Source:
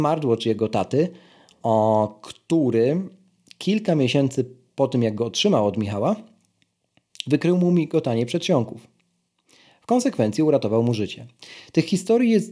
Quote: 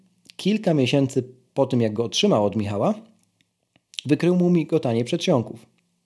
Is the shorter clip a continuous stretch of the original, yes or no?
yes